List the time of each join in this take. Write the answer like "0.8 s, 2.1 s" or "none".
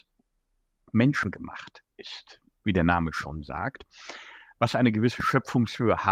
none